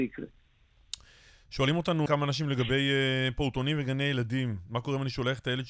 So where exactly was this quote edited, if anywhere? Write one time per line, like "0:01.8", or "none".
0:02.1